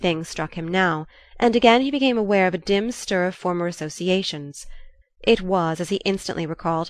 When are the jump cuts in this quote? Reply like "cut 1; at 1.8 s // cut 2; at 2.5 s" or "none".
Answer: cut 1; at 5.0 s